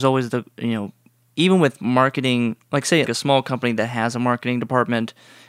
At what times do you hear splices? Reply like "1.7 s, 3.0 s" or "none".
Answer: 3.1 s